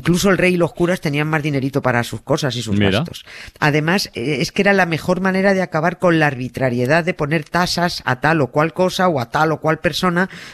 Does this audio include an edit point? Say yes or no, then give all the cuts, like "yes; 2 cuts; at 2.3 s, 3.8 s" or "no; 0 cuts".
yes; 1 cut; at 3.5 s